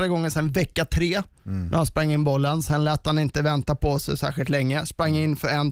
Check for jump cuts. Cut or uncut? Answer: uncut